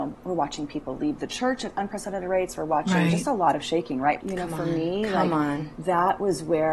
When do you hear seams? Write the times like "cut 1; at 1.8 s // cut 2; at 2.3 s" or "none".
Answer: cut 1; at 4.2 s